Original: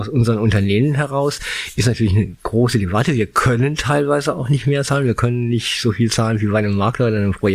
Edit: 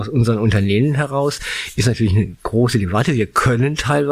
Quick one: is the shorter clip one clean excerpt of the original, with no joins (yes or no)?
yes